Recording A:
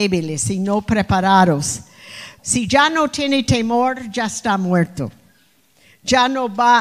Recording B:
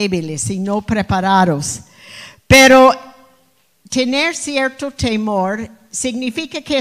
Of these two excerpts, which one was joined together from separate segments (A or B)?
A